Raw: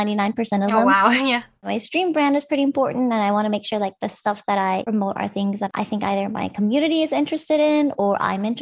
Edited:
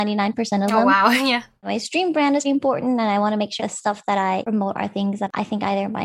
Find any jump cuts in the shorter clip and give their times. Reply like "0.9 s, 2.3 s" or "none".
2.4 s, 3.6 s